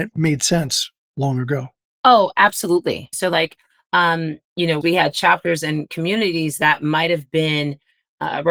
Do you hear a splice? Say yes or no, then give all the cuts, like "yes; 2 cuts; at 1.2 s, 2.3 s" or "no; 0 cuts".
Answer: yes; 2 cuts; at 3.1 s, 4.8 s